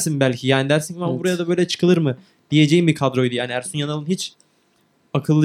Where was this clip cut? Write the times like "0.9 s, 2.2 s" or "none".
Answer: none